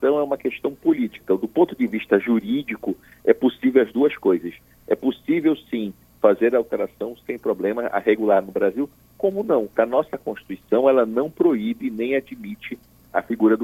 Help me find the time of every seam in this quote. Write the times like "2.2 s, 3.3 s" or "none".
1.2 s, 9.7 s